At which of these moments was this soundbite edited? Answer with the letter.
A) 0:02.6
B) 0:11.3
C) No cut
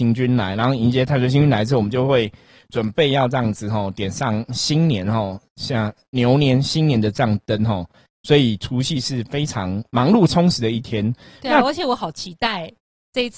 C